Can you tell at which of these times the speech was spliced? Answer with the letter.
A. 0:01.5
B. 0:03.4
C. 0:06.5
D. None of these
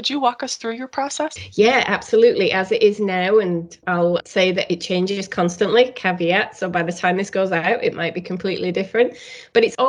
D